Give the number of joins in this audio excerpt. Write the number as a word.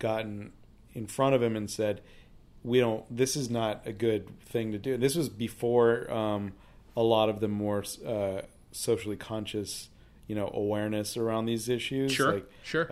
zero